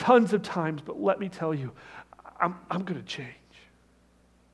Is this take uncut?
yes; 0 cuts

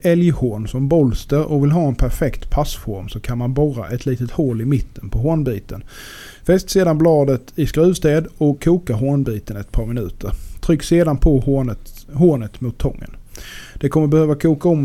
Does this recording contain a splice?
no; 0 cuts

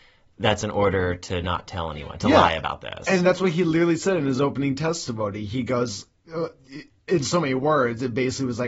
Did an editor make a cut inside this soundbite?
no; 0 cuts

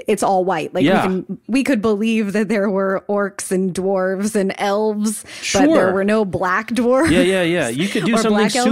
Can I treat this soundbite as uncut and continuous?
yes; 0 cuts

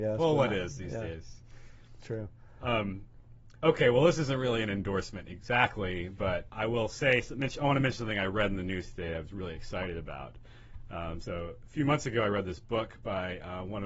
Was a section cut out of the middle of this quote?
no; 0 cuts

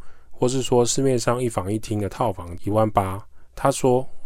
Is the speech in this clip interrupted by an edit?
no; 0 cuts

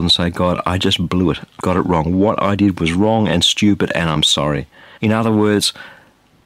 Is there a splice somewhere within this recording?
yes; 2 cuts; at 1.6 s, 5.0 s

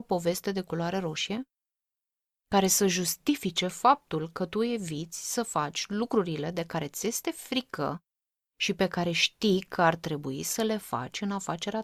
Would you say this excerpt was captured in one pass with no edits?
yes; 0 cuts

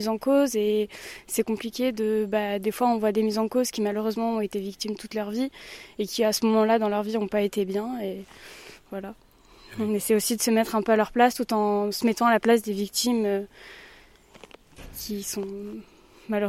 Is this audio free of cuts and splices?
yes; 0 cuts

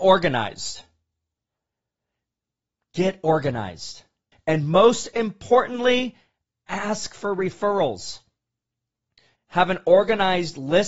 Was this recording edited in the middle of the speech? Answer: yes; 2 cuts; at 4.3 s, 9.4 s

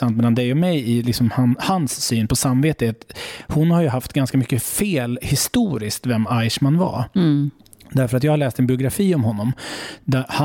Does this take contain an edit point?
no; 0 cuts

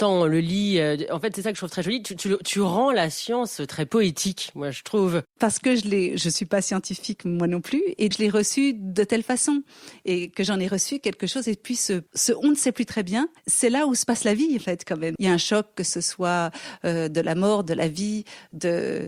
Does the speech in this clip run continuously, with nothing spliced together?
no; 3 cuts; at 8.1 s, 13.4 s, 15.2 s

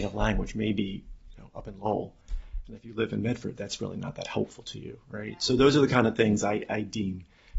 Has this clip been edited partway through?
no; 0 cuts

